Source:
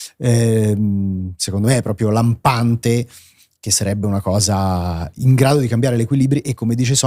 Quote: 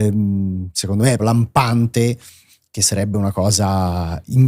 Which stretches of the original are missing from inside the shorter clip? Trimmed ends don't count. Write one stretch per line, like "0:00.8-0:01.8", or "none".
0:01.8-0:02.1